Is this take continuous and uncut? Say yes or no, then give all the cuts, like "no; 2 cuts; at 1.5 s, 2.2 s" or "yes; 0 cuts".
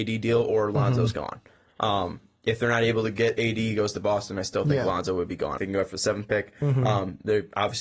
no; 1 cut; at 5.6 s